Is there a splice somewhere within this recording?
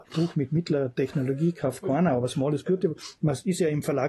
no; 0 cuts

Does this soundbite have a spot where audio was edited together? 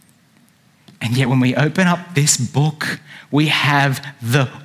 no; 0 cuts

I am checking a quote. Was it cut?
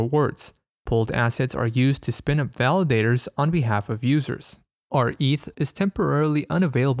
yes; 1 cut; at 5.5 s

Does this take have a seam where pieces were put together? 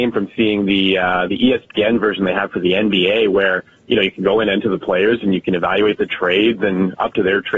no; 0 cuts

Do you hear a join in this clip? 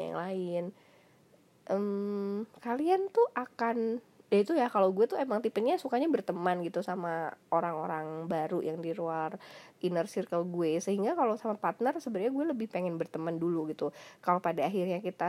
no; 0 cuts

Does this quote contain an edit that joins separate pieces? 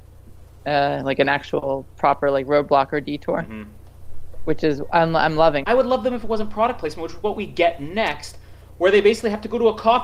yes; 1 cut; at 5.6 s

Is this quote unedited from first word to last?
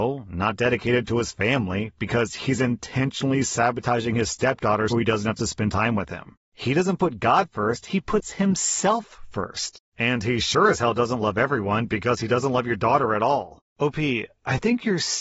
no; 1 cut; at 4.9 s

